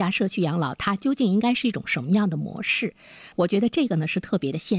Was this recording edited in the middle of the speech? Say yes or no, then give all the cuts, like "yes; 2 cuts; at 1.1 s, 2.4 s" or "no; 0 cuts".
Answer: yes; 1 cut; at 3.3 s